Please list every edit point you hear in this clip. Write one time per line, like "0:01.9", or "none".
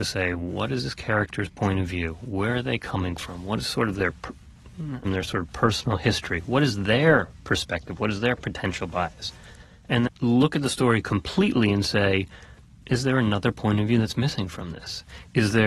0:05.0
0:10.1